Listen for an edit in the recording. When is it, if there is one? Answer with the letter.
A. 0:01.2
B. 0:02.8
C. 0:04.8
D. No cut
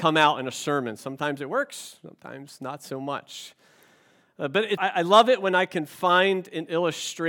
C